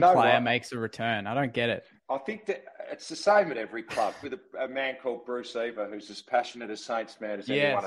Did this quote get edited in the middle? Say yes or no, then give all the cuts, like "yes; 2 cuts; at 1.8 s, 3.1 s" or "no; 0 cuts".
yes; 2 cuts; at 2.0 s, 4.2 s